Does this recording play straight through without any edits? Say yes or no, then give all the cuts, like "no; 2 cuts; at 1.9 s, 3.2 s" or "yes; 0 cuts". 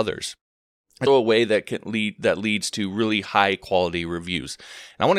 no; 1 cut; at 1.1 s